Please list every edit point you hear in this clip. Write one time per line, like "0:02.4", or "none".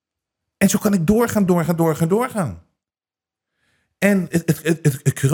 0:01.5
0:04.3

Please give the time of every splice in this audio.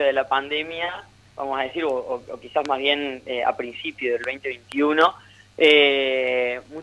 none

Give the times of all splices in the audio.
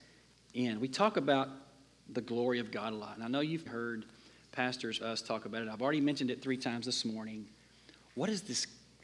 0:03.7
0:05.0

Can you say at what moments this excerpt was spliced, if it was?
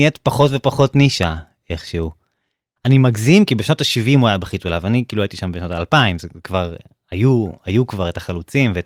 0:02.8

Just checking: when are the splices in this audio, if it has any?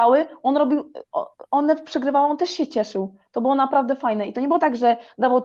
0:01.5

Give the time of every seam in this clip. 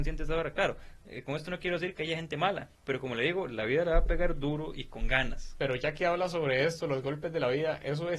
0:02.7

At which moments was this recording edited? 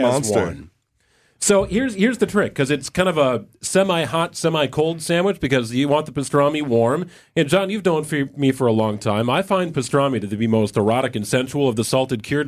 none

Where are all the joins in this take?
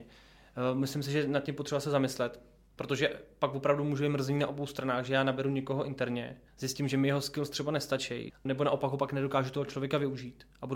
0:06.5
0:08.3

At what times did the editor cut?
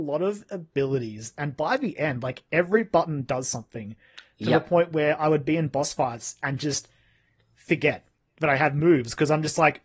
none

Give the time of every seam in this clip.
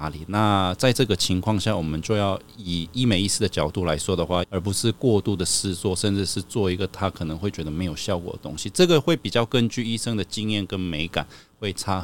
0:04.4

